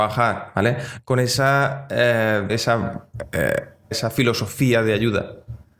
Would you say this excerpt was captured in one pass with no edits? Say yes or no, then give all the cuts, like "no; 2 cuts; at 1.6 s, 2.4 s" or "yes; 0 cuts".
no; 2 cuts; at 2.5 s, 3.9 s